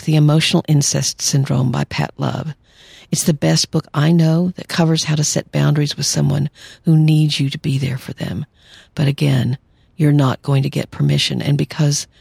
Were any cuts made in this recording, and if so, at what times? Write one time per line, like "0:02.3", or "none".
none